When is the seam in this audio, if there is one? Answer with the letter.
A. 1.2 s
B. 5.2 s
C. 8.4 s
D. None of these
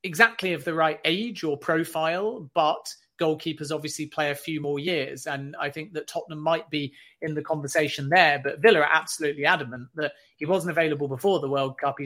D